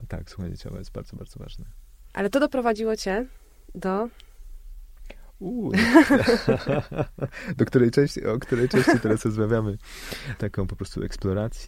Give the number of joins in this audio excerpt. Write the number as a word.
two